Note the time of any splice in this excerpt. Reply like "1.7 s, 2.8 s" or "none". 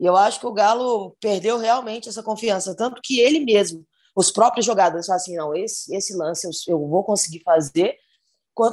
none